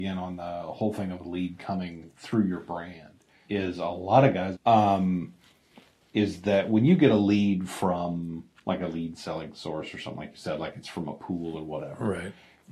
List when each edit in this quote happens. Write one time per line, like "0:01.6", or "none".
0:03.5
0:04.5